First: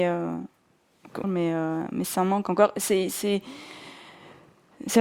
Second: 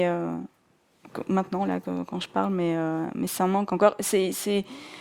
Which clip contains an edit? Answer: first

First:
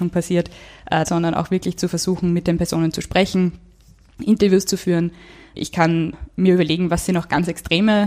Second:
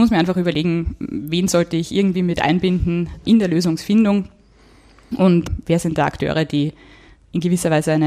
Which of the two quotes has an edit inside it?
first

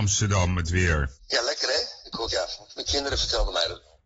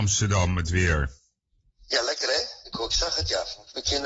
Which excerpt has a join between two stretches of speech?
first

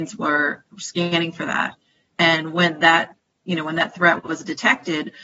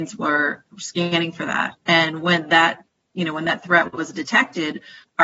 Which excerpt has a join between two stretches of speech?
second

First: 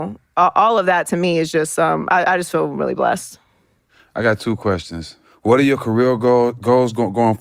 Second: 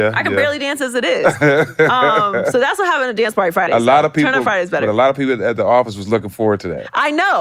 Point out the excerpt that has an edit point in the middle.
second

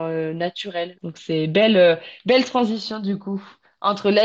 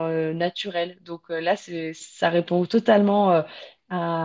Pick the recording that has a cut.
first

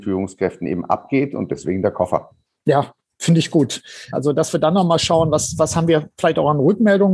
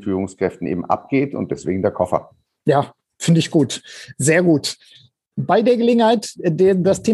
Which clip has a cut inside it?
first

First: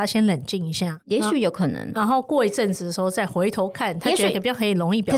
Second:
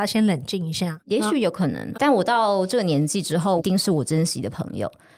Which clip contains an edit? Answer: second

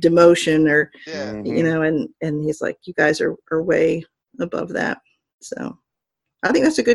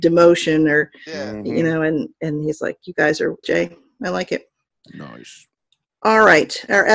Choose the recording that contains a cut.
second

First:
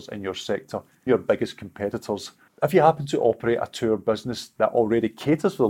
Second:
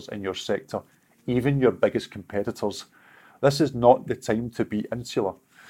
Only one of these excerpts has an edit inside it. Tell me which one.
first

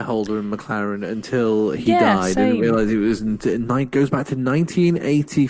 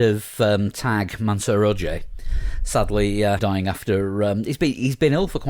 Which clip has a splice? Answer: second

